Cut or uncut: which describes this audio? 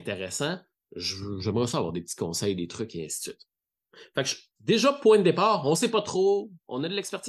uncut